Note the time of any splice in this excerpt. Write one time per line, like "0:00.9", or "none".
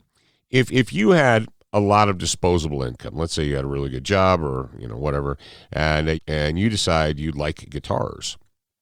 0:06.1